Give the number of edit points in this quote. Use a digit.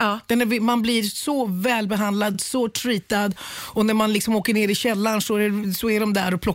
0